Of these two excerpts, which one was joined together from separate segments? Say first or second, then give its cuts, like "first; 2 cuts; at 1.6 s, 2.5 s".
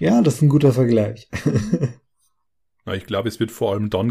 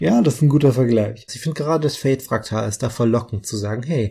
second; 1 cut; at 1.3 s